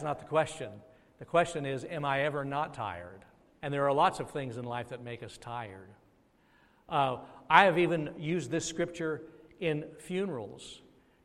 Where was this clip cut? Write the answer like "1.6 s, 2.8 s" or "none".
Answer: 3.6 s